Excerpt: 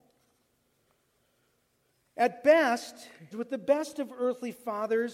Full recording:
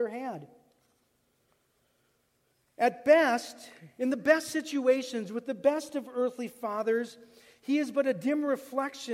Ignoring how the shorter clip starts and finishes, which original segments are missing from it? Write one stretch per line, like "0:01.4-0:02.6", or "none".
0:03.9-0:05.3